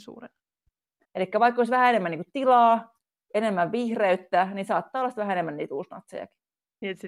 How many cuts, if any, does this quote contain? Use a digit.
1